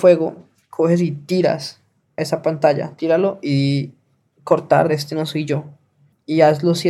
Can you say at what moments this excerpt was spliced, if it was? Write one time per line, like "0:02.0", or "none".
0:03.0
0:04.9